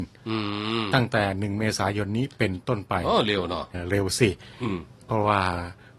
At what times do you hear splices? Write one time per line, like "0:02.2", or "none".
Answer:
0:03.7